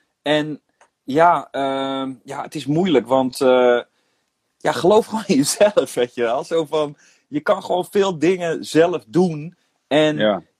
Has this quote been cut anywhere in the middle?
no; 0 cuts

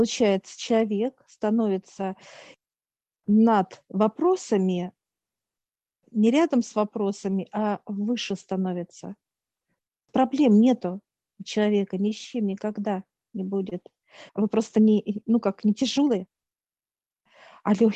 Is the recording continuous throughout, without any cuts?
no; 1 cut; at 14.3 s

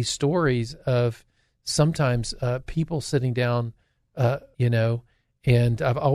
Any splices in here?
yes; 1 cut; at 4.5 s

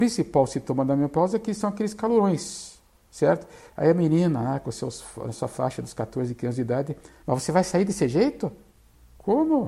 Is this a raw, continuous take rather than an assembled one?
no; 2 cuts; at 3.7 s, 7.2 s

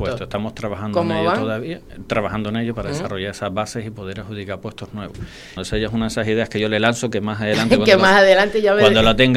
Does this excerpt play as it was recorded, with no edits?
no; 1 cut; at 5.6 s

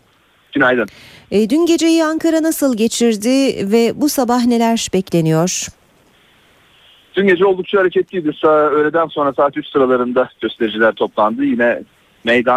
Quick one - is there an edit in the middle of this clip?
no; 0 cuts

